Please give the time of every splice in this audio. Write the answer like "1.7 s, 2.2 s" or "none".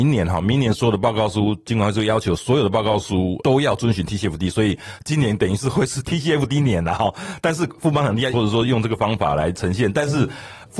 8.3 s

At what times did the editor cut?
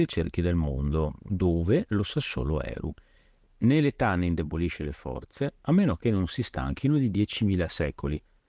3.4 s

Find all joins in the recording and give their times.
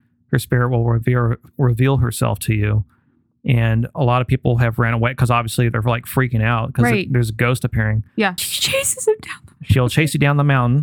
8.4 s

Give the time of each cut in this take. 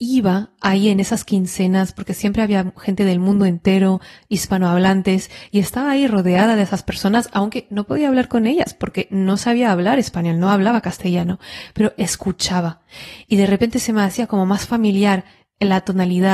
none

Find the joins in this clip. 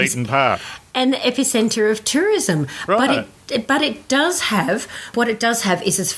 5.1 s

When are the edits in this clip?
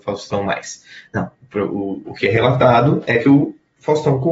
2.1 s

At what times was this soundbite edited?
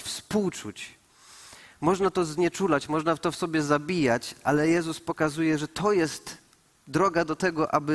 none

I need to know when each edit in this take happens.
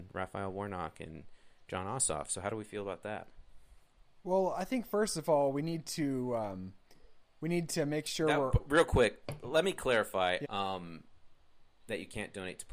10.4 s

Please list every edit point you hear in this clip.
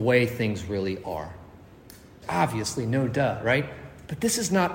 2.2 s

